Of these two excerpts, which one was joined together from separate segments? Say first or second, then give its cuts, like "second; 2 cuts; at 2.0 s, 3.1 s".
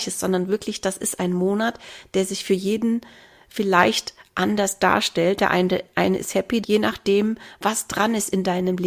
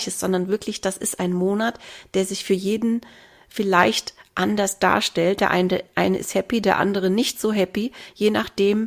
first; 1 cut; at 6.6 s